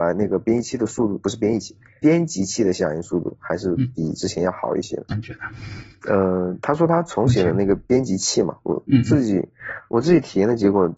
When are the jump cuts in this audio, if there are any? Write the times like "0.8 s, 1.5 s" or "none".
5.1 s